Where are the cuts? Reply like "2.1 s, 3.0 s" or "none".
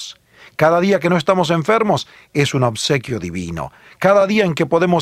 none